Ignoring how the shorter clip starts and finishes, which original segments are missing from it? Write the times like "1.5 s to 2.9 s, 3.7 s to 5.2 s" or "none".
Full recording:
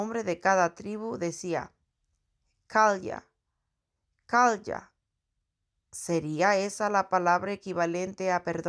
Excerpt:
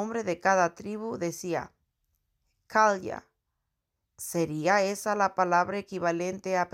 4.1 s to 5.8 s